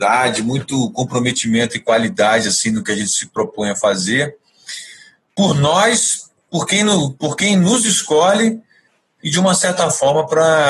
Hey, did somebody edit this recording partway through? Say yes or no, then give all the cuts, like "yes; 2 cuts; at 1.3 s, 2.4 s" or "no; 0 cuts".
no; 0 cuts